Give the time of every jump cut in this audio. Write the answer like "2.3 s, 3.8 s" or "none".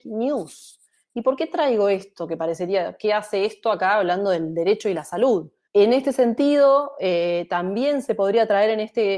5.7 s

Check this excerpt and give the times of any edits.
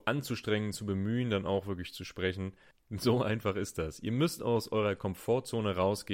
2.7 s

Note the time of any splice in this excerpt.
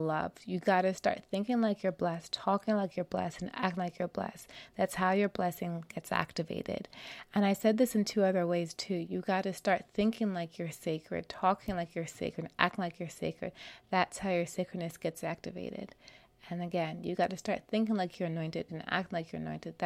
18.7 s

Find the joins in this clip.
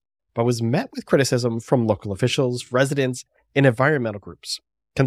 none

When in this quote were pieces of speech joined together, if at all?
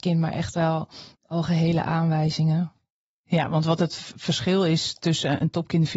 1.1 s

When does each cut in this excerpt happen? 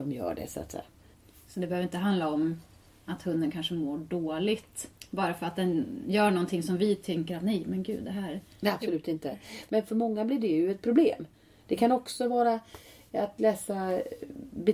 9.7 s

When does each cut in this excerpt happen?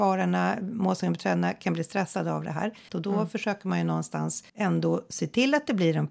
2.9 s, 4.5 s

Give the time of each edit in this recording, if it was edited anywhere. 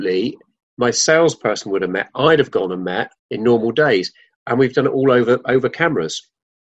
3.2 s

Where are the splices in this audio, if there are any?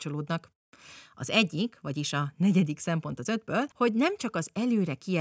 3.7 s

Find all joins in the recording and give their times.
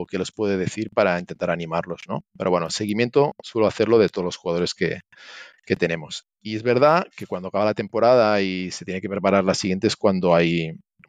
none

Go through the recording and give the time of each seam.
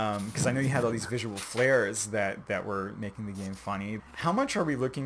4.0 s

